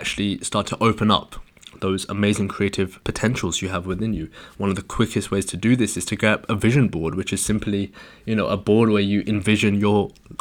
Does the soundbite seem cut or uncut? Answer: uncut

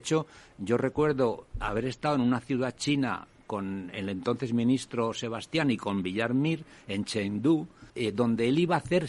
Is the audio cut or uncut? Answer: cut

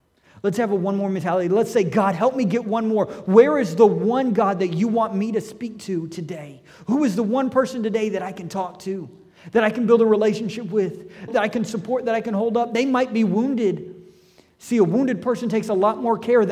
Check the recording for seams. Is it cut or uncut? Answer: cut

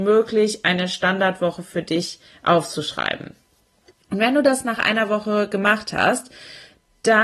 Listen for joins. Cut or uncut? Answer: uncut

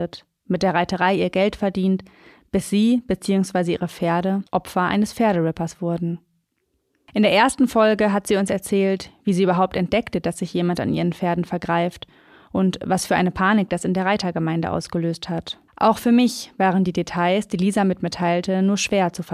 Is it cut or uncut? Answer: cut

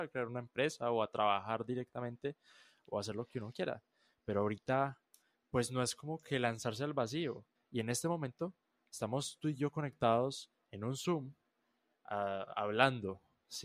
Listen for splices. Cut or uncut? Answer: cut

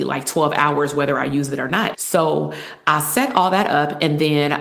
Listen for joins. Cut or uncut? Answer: cut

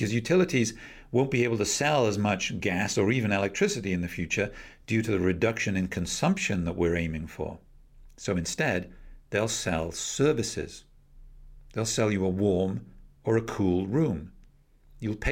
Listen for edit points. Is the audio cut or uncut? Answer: uncut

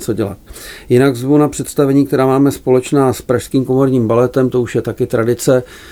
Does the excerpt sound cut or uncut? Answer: uncut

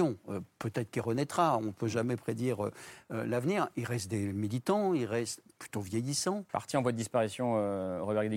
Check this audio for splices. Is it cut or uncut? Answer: cut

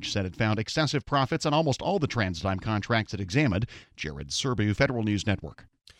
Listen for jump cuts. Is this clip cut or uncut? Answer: cut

